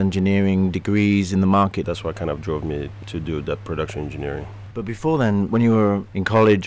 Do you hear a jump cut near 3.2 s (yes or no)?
no